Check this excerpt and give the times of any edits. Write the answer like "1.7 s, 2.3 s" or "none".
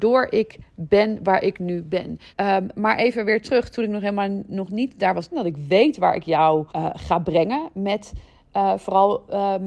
2.3 s, 5.3 s, 6.7 s